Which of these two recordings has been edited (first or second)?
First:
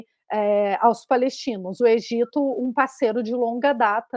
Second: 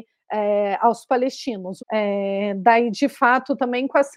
second